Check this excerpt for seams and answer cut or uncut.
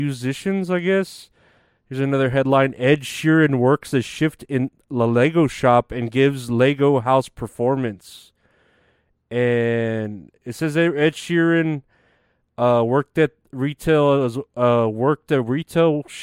uncut